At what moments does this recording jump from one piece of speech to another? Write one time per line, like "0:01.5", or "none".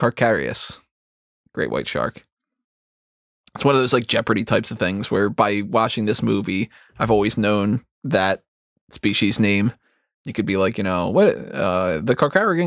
none

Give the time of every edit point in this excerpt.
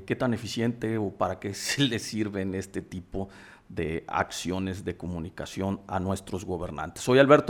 none

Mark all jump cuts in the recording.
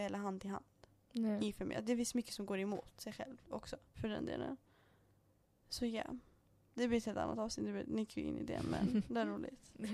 0:03.9

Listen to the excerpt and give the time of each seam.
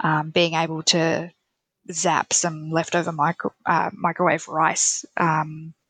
none

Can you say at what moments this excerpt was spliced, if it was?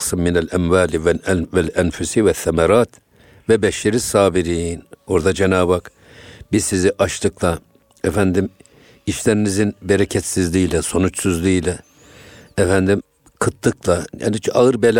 none

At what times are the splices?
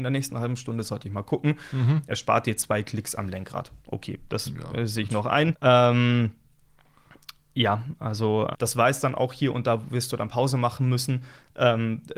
0:05.5
0:08.5

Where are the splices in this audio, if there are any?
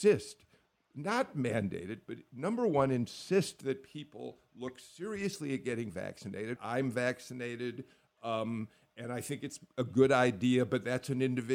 0:06.6

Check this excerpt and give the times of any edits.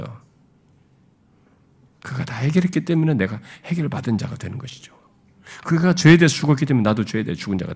0:01.8

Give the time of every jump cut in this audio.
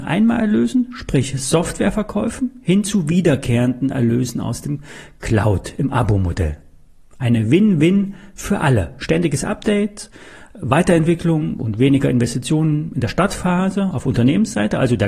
none

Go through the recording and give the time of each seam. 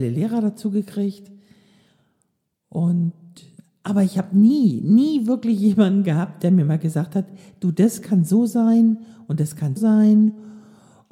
0:09.8

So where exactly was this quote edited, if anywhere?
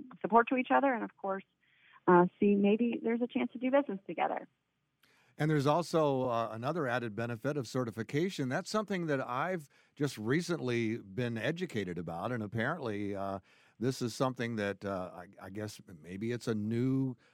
none

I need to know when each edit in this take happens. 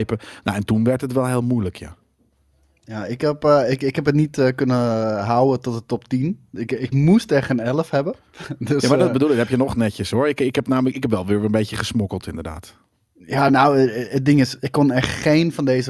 none

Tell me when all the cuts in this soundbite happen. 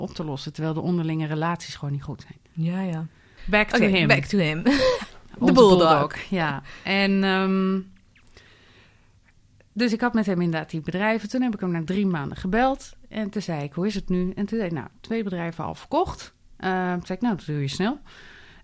0:03.4

